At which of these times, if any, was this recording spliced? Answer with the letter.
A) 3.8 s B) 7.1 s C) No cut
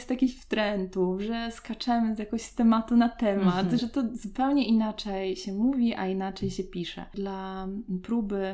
A